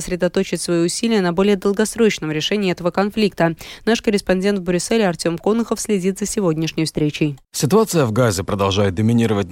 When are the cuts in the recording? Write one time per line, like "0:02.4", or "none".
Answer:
0:07.4